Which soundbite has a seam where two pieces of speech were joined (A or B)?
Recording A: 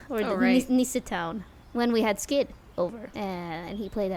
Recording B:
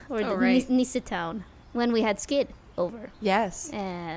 A